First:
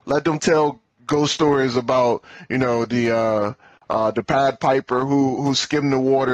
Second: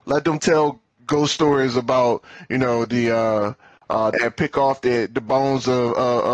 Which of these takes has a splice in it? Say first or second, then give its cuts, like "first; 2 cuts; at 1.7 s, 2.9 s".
second; 1 cut; at 4.1 s